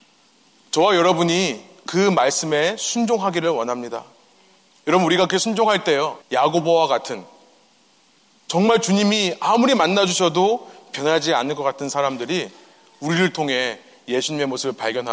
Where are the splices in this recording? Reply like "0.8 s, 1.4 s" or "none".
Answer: 6.2 s